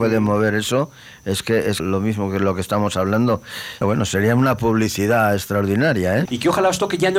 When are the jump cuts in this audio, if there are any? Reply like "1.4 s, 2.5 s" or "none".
1.8 s, 3.8 s, 6.3 s